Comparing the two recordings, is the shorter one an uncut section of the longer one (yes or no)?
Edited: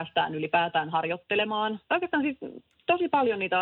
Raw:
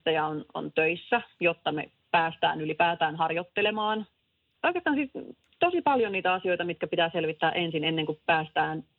no